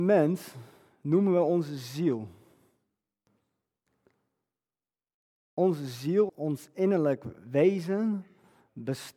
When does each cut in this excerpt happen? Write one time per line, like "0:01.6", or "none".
0:06.3